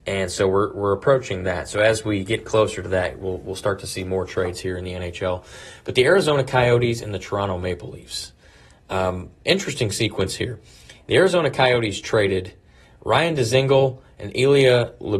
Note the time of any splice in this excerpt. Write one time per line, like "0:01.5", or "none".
none